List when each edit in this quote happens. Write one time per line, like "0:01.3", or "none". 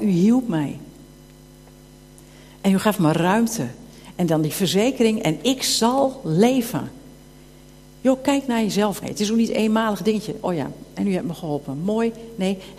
0:09.0